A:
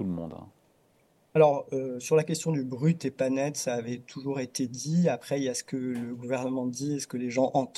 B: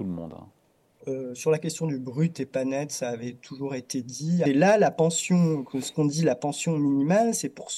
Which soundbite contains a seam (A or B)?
B